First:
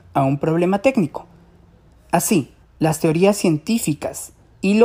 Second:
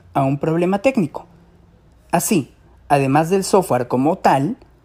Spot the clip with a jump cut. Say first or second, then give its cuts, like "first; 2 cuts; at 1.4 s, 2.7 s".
first; 1 cut; at 2.6 s